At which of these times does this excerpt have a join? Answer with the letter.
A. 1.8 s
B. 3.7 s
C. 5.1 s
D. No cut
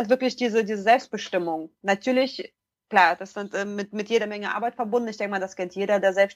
D